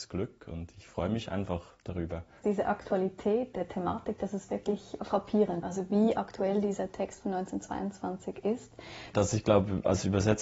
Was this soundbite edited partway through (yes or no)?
yes